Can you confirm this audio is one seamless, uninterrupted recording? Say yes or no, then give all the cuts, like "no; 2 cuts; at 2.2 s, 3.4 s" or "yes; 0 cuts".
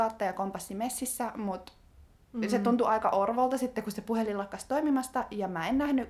yes; 0 cuts